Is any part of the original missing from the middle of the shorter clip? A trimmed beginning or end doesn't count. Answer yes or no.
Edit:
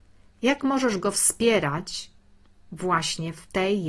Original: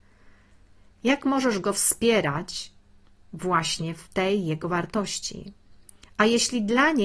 no